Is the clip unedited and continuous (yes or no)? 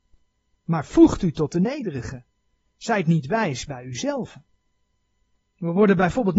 yes